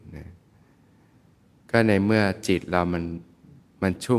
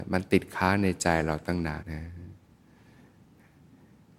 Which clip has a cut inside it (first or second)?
second